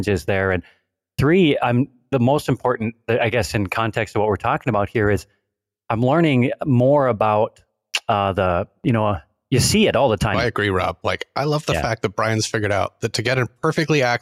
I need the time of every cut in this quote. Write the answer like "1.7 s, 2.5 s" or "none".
10.3 s